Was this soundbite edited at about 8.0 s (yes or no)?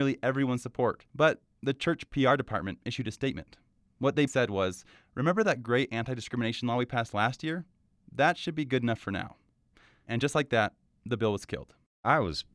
no